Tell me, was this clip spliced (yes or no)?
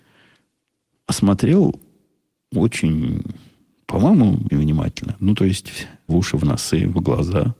yes